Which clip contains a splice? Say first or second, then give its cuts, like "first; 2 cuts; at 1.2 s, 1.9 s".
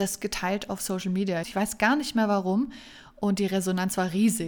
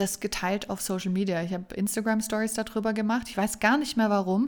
first; 1 cut; at 1.4 s